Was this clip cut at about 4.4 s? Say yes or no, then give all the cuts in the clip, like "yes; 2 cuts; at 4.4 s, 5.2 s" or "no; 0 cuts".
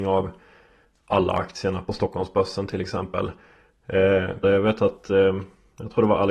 yes; 1 cut; at 4.4 s